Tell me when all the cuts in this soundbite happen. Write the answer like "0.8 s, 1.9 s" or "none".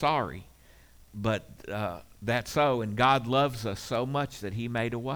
1.0 s